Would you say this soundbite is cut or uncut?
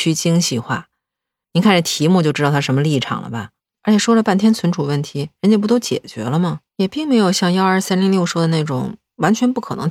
cut